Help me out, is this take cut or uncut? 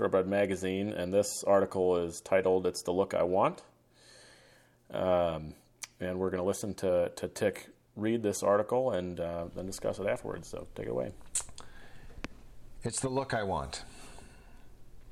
uncut